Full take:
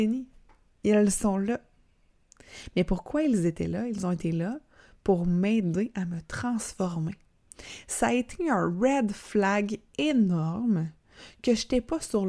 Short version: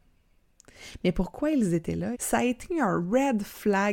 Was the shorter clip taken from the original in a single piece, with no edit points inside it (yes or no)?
no